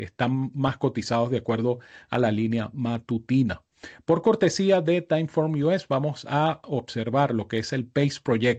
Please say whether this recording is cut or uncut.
uncut